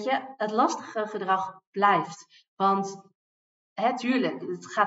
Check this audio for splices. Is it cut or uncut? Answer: uncut